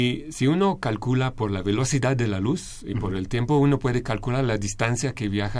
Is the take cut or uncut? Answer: uncut